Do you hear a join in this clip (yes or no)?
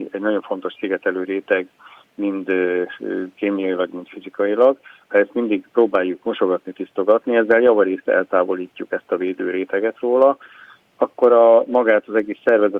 no